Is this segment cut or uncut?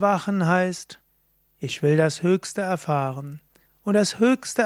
uncut